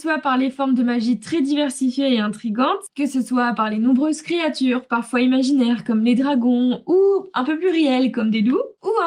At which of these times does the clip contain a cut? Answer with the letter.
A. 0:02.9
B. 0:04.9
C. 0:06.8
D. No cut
D